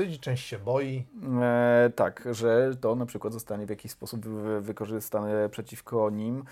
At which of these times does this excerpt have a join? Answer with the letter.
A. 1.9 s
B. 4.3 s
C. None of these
C